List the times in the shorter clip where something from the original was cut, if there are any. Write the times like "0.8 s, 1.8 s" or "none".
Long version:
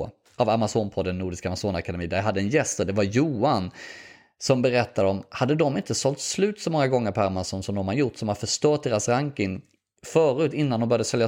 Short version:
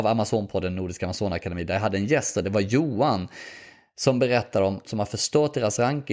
4.8 s